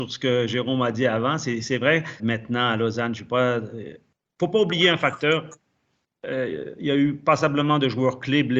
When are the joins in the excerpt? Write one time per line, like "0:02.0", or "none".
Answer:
0:02.2